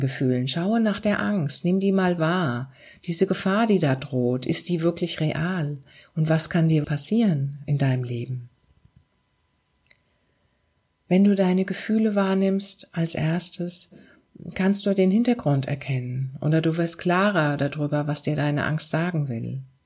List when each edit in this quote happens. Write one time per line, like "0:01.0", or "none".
0:06.8